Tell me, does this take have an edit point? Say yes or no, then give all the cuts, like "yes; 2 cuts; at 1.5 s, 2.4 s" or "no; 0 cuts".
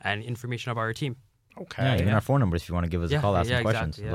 no; 0 cuts